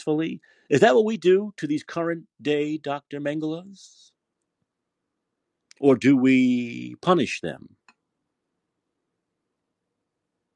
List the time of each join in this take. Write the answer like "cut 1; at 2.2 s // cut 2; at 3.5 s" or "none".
none